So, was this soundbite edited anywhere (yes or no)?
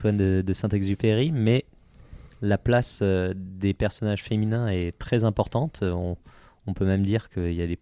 no